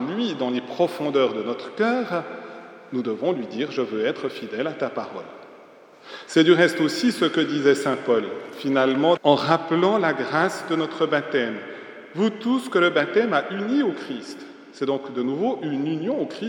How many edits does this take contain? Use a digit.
1